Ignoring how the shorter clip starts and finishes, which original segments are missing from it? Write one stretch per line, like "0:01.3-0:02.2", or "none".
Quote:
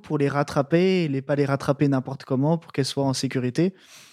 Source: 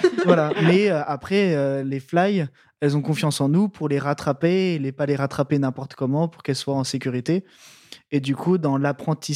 none

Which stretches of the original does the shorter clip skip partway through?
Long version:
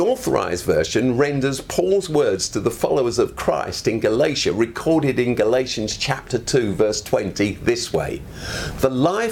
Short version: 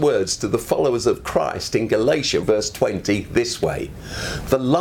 0:04.5-0:06.7

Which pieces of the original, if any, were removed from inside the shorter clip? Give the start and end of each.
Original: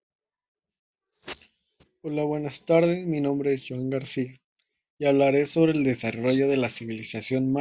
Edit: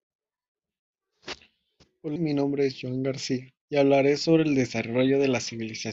0:02.2-0:03.0
0:04.5-0:04.9

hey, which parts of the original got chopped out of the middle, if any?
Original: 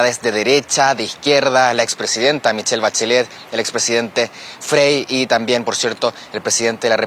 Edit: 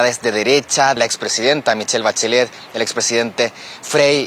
0:01.0-0:01.7

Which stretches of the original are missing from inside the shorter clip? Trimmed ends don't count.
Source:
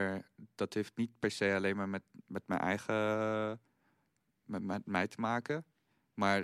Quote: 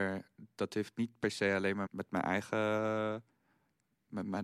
0:01.9-0:02.2

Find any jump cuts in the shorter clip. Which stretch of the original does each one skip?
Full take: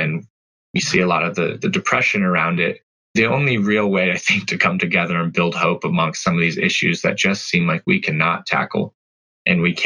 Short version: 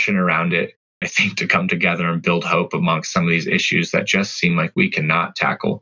0:03.1-0:04.1

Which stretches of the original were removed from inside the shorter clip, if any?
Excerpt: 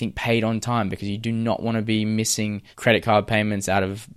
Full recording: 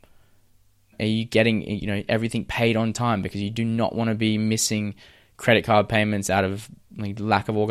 0:05.0-0:05.3

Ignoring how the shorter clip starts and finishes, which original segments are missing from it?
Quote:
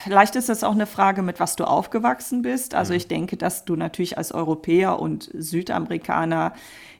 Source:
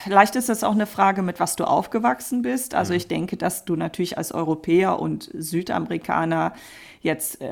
none

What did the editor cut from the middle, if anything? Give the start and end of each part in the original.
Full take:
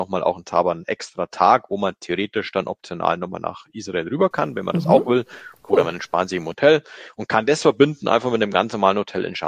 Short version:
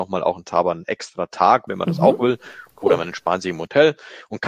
0:01.7-0:04.5

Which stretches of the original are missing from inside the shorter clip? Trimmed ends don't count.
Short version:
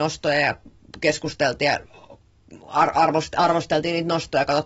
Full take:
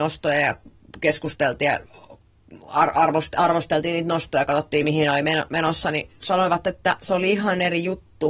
none

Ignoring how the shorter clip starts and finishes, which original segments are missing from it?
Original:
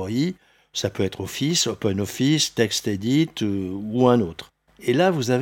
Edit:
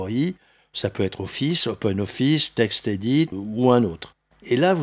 0:03.3-0:03.7

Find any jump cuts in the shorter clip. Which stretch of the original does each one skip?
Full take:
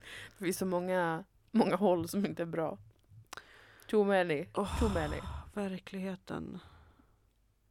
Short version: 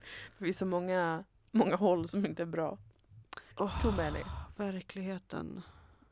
0:03.5-0:04.5

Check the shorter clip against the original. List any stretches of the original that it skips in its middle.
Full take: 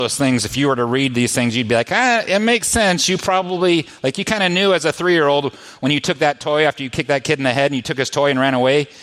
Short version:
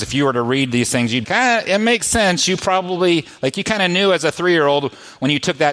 0:01.7-0:01.8

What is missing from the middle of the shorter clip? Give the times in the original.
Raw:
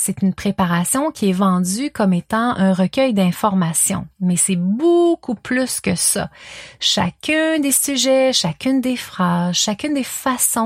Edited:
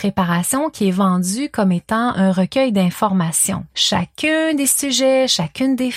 0:04.1-0:06.8

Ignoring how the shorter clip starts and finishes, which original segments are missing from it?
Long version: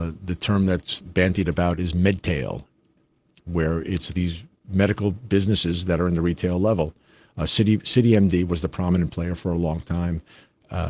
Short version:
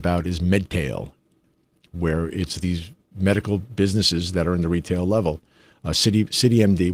none

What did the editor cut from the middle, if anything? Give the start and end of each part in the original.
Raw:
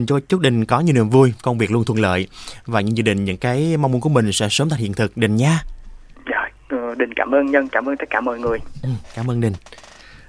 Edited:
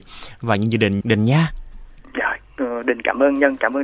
0:03.3-0:05.1

